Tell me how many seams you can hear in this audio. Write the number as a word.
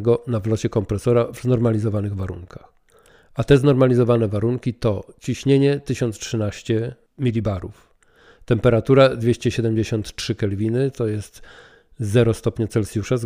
zero